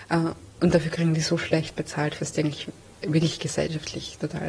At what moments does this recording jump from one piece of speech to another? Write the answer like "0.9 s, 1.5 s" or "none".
2.2 s